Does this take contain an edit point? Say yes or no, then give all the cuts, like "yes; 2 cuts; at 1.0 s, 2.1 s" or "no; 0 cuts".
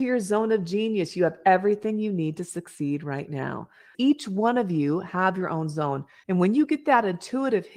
yes; 2 cuts; at 3.9 s, 6.2 s